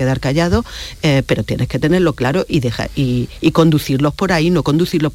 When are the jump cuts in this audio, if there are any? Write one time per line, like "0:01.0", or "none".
none

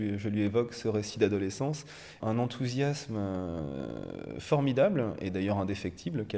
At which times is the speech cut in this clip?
0:02.2

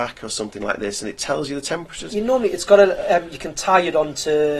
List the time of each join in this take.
0:02.1

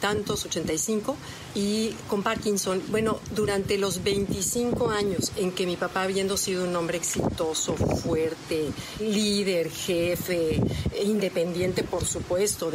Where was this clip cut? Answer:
0:02.8

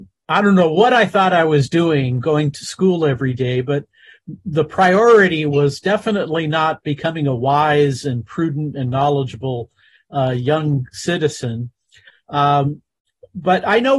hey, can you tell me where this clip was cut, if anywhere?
0:12.1

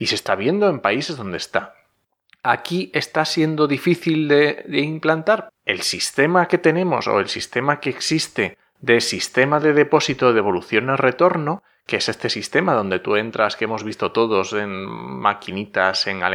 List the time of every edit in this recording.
0:05.5

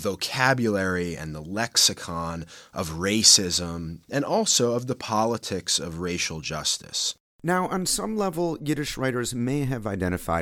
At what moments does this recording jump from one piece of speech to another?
0:04.0

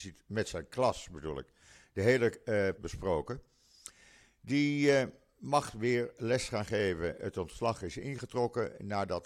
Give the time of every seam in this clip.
0:02.8

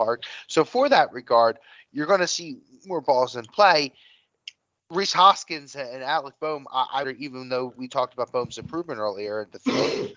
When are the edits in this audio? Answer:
0:07.0

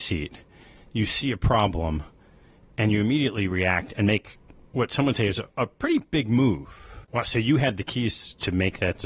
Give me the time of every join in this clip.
0:07.0

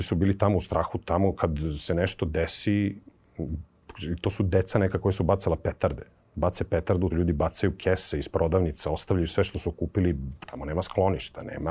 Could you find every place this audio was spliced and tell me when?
0:07.1
0:10.5

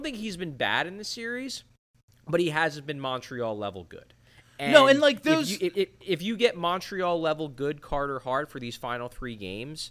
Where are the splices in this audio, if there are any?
none

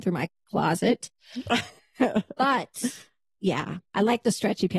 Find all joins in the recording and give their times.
0:03.9

